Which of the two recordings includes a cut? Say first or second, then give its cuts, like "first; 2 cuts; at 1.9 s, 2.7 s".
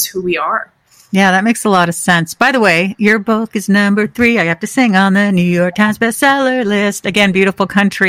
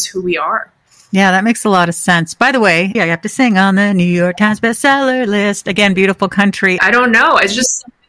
second; 2 cuts; at 2.9 s, 6.8 s